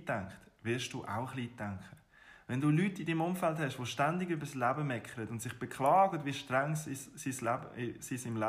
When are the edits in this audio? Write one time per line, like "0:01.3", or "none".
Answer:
none